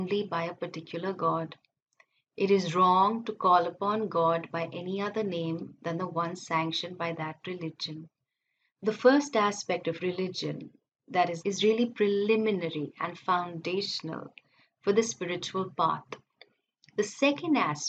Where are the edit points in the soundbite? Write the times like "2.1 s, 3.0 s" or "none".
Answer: 8.7 s, 11.4 s